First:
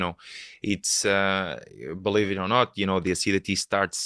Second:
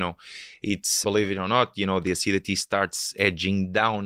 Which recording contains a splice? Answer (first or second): second